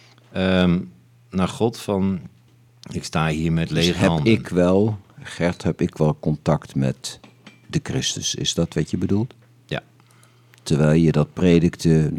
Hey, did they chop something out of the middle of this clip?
no; 0 cuts

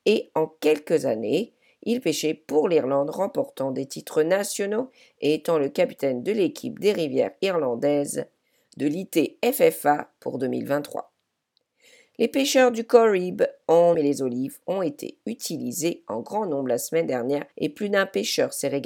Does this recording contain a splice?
yes; 2 cuts; at 13.9 s, 17.5 s

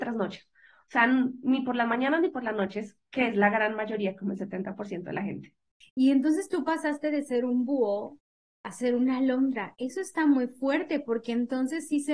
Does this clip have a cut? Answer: no; 0 cuts

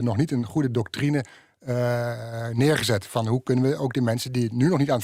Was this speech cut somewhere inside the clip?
no; 0 cuts

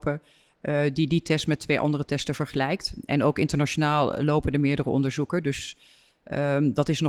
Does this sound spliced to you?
no; 0 cuts

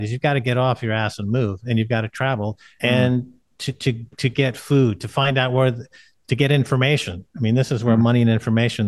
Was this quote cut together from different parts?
yes; 1 cut; at 2.8 s

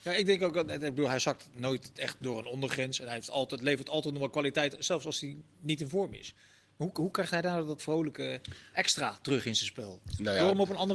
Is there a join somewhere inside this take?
yes; 1 cut; at 7.8 s

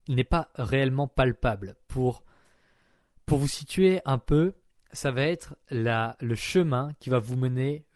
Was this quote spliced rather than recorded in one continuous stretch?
no; 0 cuts

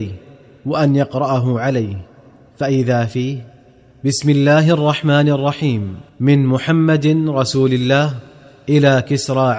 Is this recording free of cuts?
no; 1 cut; at 6.1 s

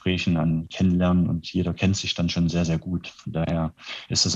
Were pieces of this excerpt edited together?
no; 0 cuts

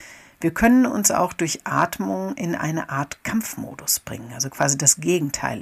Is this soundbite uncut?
yes; 0 cuts

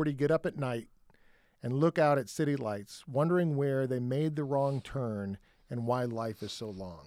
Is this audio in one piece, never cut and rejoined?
yes; 0 cuts

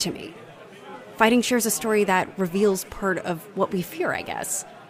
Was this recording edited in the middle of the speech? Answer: no; 0 cuts

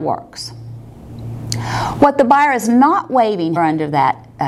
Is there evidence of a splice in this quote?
yes; 1 cut; at 3.6 s

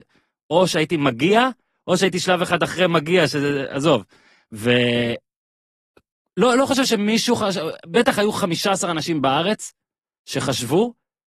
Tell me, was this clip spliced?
no; 0 cuts

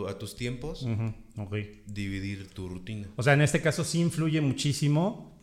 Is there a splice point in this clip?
no; 0 cuts

